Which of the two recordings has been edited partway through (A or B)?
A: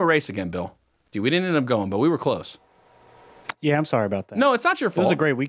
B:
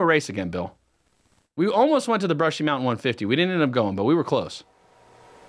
A